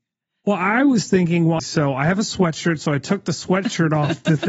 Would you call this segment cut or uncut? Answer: cut